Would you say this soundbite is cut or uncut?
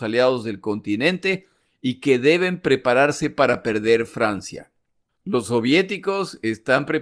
cut